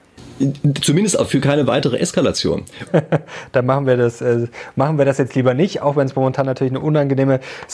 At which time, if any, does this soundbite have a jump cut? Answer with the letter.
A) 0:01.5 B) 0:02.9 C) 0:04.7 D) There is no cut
B